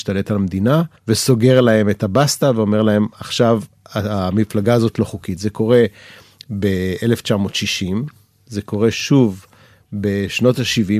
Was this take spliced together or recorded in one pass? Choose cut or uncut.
cut